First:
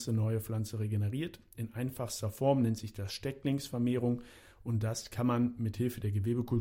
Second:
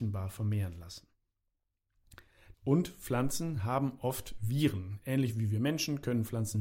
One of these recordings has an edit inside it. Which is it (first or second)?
second